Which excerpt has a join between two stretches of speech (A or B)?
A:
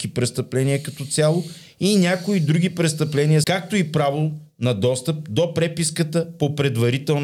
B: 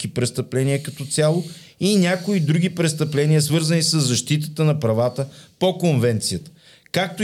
A